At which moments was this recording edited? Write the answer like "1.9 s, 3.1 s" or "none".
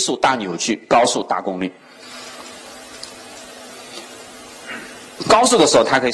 5.2 s